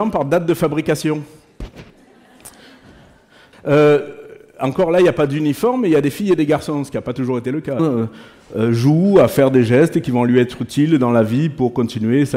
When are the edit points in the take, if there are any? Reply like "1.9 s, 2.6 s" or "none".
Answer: 3.5 s, 7.8 s